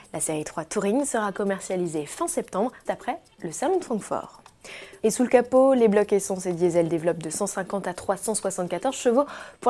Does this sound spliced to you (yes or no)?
yes